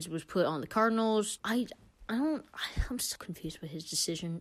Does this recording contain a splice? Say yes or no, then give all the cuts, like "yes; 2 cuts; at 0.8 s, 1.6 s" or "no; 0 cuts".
yes; 2 cuts; at 1.4 s, 3.2 s